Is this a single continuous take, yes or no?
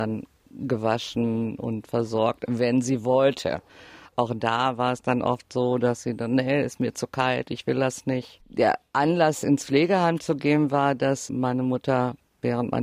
no